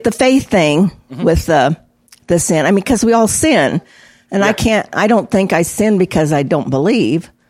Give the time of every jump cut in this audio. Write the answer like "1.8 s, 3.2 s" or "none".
none